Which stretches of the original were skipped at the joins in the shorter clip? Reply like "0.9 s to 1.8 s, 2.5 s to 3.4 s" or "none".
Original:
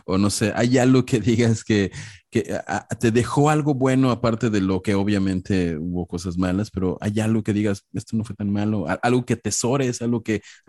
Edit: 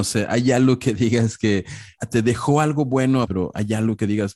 2.2 s to 2.9 s, 4.1 s to 6.7 s